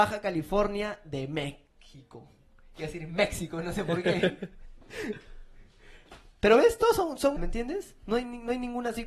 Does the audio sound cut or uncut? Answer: cut